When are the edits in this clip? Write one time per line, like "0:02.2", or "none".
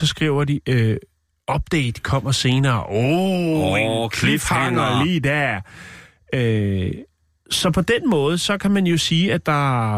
none